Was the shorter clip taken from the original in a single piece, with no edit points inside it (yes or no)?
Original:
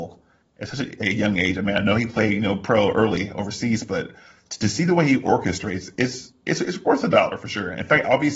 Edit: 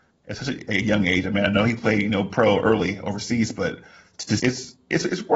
no